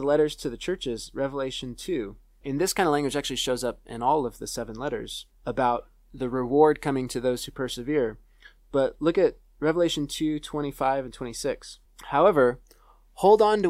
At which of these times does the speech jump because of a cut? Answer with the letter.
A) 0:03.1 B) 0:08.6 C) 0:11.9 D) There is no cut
D